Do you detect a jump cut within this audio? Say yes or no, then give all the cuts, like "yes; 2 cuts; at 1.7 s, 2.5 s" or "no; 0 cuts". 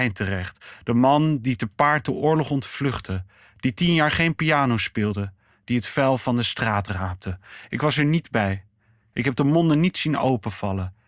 no; 0 cuts